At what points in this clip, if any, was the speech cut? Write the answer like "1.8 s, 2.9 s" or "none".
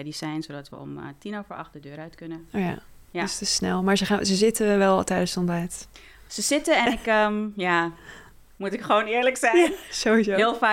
none